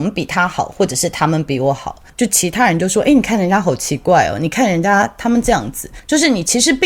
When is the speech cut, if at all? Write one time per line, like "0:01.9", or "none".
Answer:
0:02.1